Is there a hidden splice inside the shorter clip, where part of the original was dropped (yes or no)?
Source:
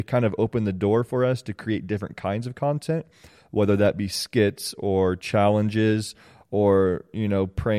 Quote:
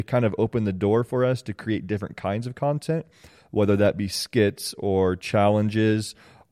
no